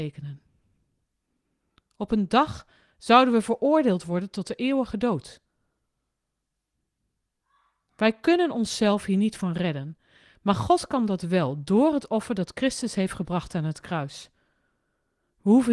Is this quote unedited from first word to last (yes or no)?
yes